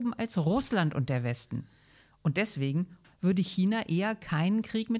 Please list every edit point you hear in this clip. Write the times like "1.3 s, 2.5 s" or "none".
3.0 s